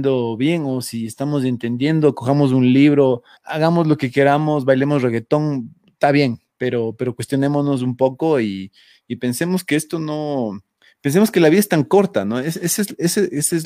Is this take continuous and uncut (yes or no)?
no